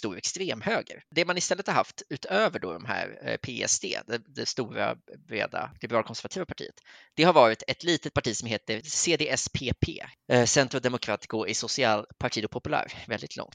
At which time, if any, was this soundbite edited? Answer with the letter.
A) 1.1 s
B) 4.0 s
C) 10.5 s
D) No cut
D